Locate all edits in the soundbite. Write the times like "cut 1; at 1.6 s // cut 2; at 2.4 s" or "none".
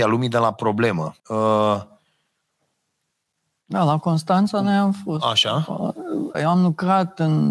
cut 1; at 1.2 s // cut 2; at 6.3 s